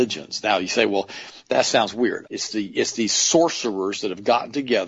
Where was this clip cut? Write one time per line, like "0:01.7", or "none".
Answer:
0:02.2